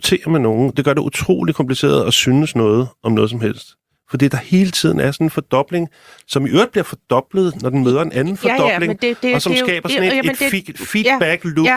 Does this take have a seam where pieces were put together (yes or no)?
no